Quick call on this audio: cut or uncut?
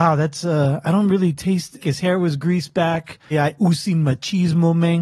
cut